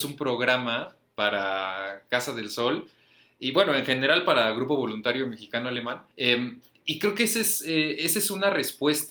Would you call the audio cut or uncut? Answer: cut